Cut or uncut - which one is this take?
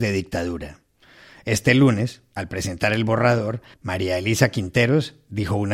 cut